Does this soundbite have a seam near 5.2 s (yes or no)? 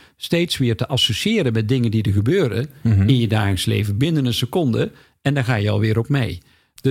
no